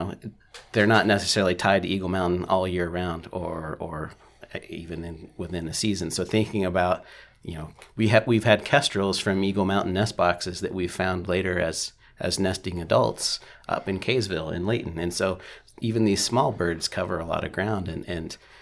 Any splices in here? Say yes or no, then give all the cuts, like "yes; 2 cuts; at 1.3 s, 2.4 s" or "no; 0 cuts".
no; 0 cuts